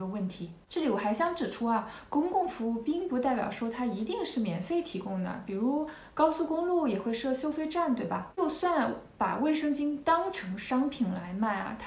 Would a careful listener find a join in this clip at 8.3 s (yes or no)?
yes